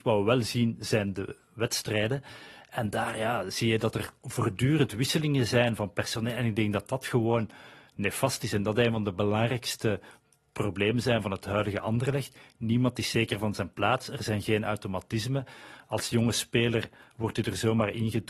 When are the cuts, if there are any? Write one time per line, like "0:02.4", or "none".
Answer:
none